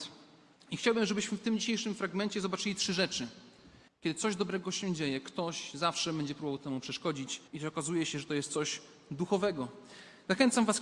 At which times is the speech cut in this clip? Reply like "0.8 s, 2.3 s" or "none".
3.9 s, 7.5 s